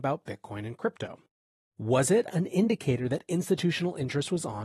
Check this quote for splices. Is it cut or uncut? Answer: cut